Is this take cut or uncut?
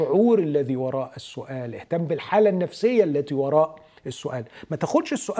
uncut